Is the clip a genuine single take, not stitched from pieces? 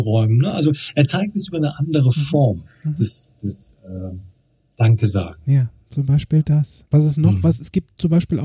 no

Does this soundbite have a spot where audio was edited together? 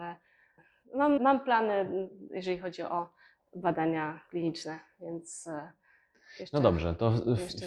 yes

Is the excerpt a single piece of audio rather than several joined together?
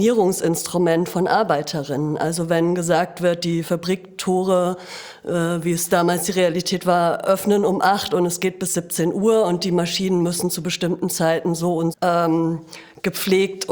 no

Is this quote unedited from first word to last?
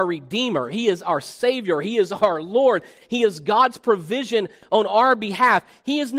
yes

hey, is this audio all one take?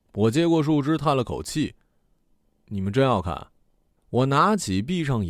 no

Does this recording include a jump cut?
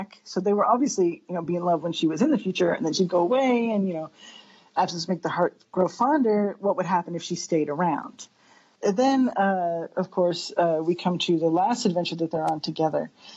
no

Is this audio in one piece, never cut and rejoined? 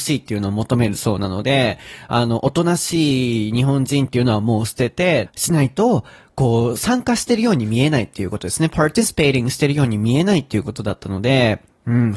no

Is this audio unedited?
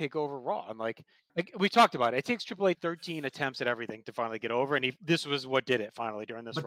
no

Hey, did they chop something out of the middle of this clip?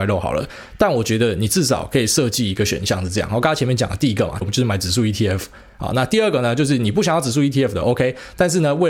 yes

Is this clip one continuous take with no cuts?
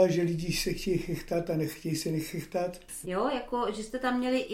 no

